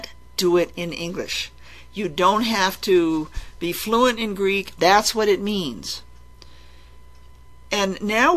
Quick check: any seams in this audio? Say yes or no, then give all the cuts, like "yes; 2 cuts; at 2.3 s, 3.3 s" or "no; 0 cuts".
yes; 1 cut; at 4.8 s